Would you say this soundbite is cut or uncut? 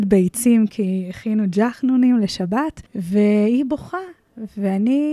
cut